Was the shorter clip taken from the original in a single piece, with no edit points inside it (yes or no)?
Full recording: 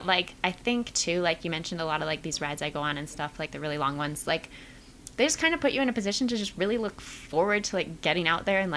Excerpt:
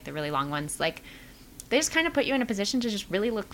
yes